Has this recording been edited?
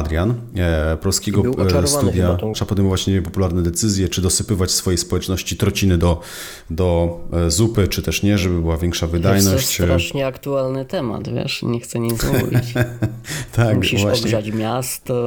yes; 1 cut; at 2.5 s

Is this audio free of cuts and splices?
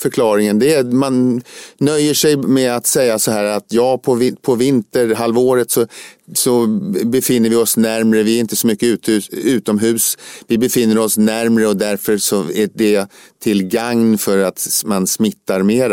yes; 0 cuts

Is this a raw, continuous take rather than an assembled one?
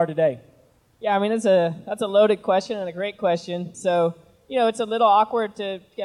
no; 1 cut; at 3.7 s

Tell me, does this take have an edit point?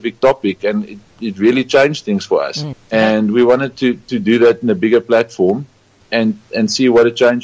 yes; 2 cuts; at 2.7 s, 6.0 s

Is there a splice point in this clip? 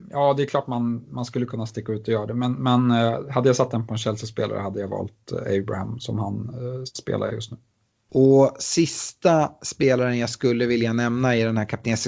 no; 0 cuts

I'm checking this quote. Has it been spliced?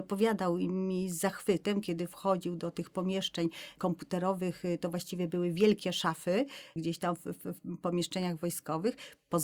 no; 0 cuts

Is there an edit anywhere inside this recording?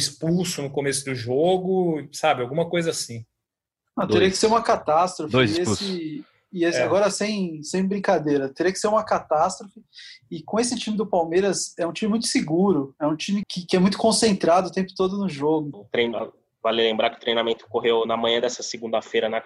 yes; 2 cuts; at 13.4 s, 15.7 s

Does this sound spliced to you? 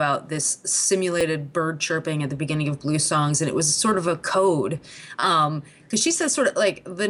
no; 0 cuts

